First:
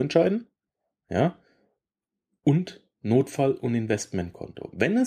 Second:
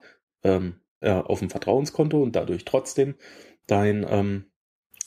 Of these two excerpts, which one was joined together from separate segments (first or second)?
second